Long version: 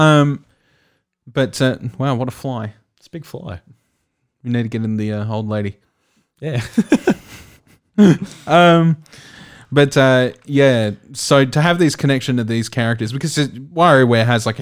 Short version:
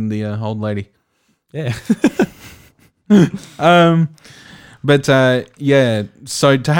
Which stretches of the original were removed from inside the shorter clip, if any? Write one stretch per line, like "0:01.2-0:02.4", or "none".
none